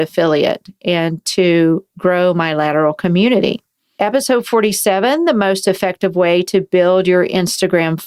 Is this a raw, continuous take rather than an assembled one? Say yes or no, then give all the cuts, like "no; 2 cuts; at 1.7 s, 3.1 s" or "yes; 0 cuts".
yes; 0 cuts